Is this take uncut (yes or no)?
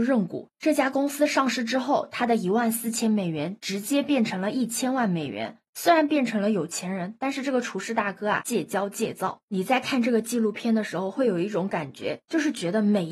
no